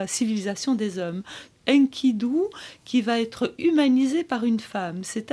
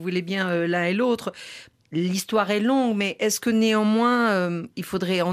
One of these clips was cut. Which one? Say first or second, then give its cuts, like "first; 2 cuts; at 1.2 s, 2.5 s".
first; 1 cut; at 1.5 s